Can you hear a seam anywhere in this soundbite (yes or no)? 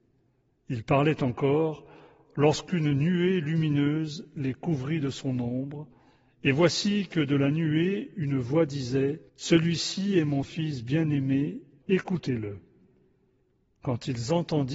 yes